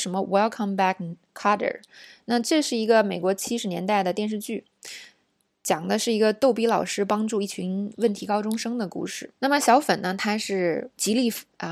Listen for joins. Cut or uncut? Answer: cut